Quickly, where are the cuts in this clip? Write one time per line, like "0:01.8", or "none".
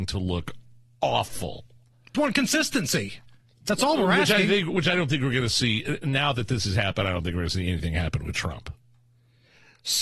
0:02.1